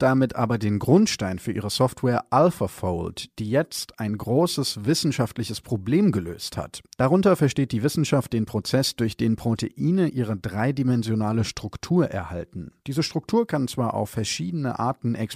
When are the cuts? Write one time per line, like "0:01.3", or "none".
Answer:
0:06.9
0:12.8